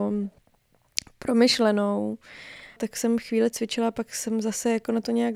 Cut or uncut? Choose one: cut